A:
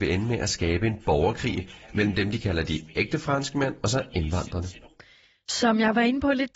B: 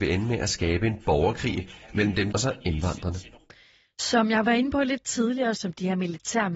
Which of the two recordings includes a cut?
B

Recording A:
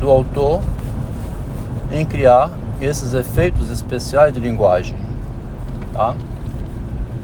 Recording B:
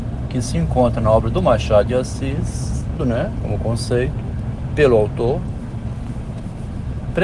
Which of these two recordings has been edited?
B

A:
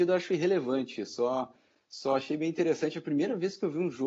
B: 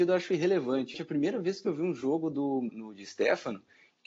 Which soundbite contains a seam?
B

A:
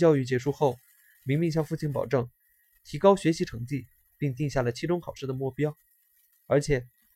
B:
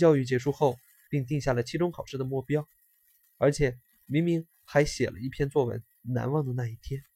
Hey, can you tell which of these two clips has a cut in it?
B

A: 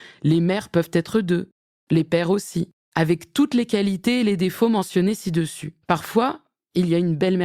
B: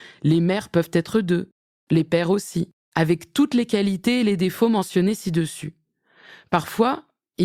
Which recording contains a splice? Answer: A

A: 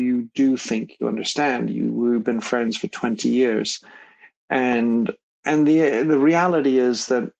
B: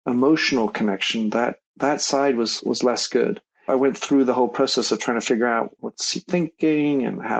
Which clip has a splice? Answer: B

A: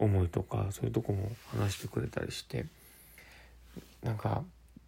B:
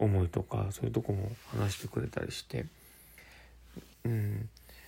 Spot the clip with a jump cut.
B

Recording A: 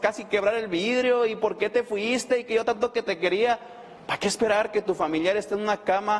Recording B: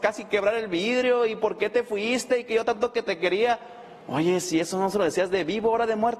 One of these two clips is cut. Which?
A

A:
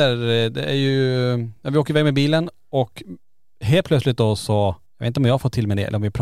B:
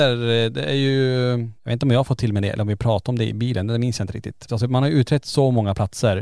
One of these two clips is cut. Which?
B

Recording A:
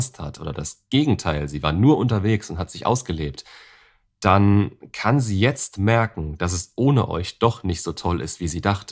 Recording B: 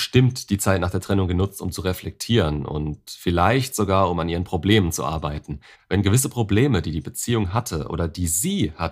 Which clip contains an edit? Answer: B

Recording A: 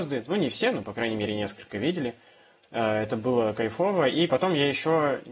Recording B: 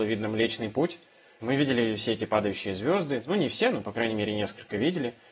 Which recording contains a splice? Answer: B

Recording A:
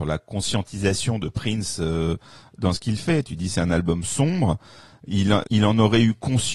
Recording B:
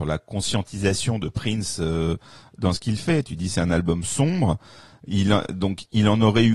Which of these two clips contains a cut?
A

